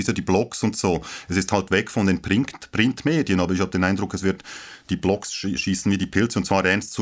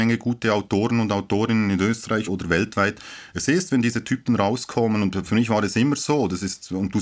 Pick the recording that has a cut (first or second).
second